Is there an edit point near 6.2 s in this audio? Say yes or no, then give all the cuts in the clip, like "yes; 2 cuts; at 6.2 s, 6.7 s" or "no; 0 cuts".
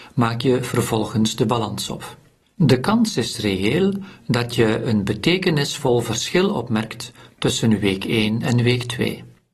no; 1 cut; at 2.5 s